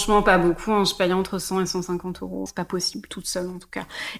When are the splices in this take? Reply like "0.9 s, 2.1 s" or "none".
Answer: 2.5 s